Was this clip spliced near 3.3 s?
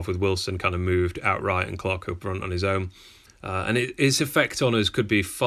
yes; 1 cut; at 3.3 s

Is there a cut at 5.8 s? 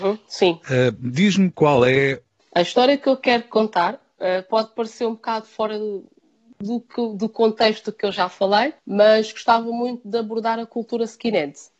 no; 2 cuts; at 2.4 s, 8.8 s

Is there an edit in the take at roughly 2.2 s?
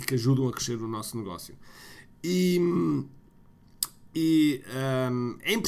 no; 0 cuts

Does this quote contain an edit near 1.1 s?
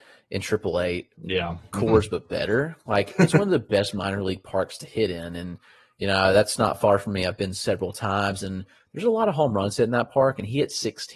yes; 1 cut; at 1.1 s

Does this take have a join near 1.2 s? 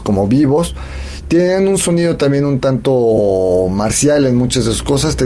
no; 0 cuts

